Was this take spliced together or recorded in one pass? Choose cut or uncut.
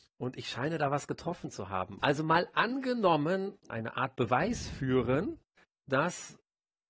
cut